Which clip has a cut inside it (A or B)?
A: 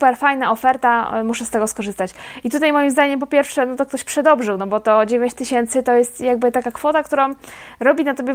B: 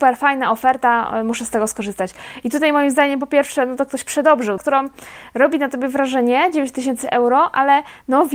B